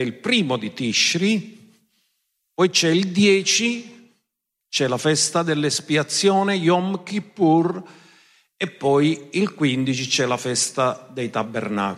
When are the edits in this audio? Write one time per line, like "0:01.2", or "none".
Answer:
none